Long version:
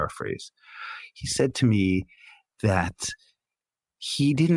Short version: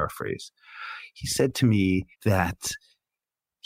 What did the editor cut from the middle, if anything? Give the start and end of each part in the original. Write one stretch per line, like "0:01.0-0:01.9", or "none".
0:02.1-0:02.5